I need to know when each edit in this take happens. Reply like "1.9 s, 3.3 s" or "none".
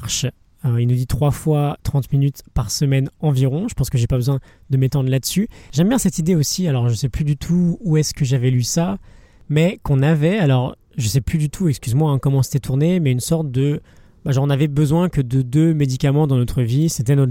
none